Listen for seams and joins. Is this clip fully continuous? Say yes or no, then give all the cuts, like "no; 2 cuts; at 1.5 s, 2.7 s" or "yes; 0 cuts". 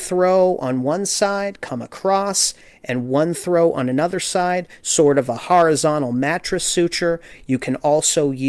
yes; 0 cuts